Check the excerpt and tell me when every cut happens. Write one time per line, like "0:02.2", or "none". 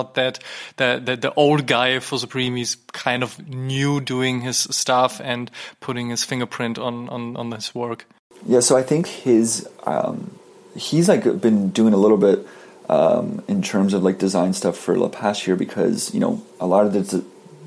0:09.0

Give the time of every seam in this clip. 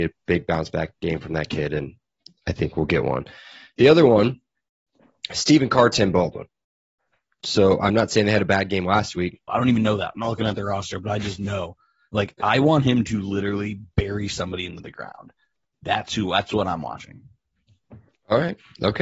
0:09.5

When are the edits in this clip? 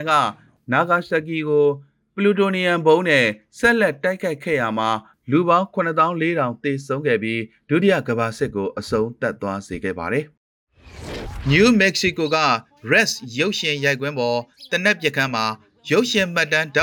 none

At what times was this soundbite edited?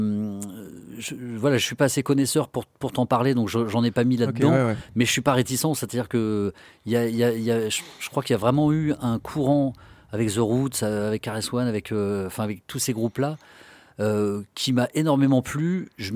none

